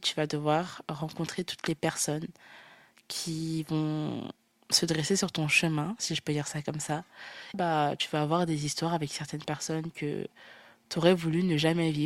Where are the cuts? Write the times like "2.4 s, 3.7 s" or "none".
7.5 s